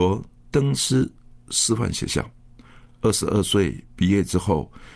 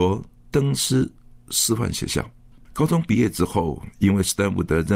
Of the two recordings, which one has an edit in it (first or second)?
second